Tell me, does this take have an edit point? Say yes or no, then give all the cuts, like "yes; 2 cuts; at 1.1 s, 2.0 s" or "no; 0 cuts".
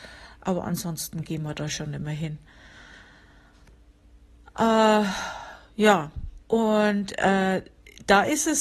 yes; 1 cut; at 6.4 s